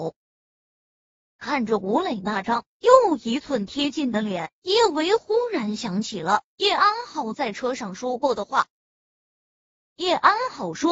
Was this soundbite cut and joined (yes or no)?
yes